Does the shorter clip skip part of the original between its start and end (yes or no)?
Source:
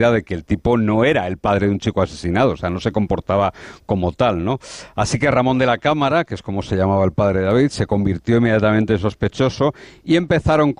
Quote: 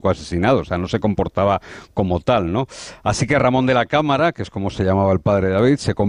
no